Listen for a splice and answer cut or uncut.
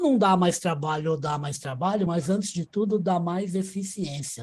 uncut